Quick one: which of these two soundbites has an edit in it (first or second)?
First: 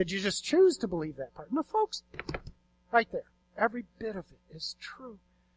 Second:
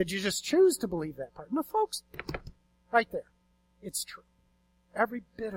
first